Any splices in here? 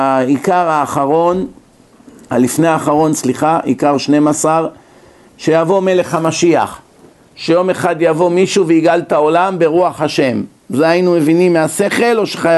no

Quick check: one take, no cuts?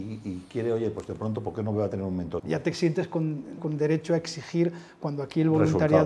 no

